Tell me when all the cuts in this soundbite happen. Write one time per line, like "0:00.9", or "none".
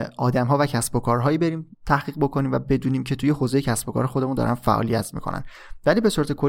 0:01.7